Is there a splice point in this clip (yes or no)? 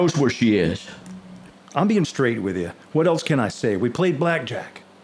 yes